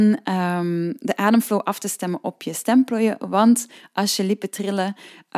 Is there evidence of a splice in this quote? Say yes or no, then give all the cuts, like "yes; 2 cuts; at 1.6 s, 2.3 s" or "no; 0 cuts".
no; 0 cuts